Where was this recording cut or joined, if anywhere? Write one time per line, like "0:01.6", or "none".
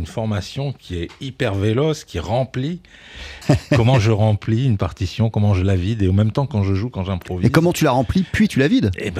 0:03.4